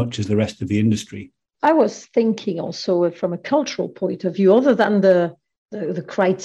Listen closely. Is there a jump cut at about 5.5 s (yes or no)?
no